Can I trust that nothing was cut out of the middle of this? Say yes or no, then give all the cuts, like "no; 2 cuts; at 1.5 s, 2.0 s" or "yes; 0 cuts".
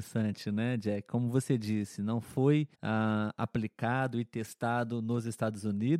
no; 1 cut; at 2.7 s